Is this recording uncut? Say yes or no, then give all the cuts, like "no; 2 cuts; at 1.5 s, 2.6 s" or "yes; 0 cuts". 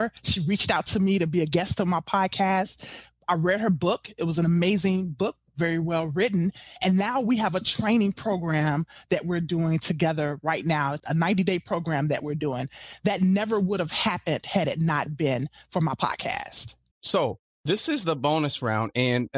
no; 2 cuts; at 11.0 s, 16.9 s